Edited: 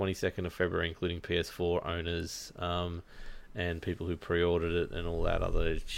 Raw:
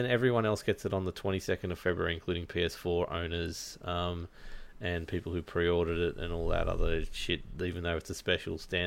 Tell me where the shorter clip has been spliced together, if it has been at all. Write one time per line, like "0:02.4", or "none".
none